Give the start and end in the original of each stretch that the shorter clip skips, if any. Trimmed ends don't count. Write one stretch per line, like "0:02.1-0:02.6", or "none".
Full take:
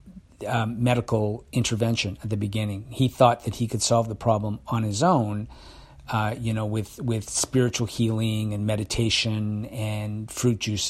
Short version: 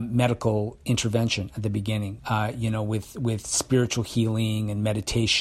0:02.9-0:06.0